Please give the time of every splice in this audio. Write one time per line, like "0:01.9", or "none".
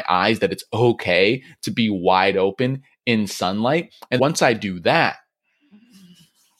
0:04.2